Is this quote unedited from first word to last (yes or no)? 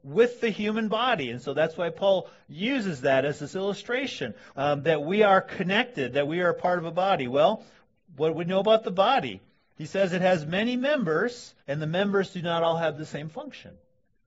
no